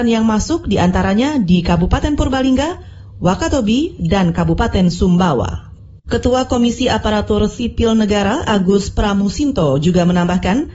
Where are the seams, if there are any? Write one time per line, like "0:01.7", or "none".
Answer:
0:06.0

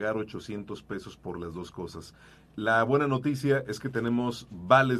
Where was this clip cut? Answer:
none

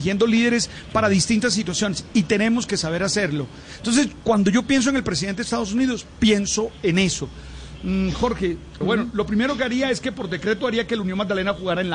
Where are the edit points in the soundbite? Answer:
0:08.8

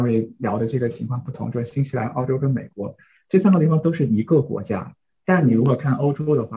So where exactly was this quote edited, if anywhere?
none

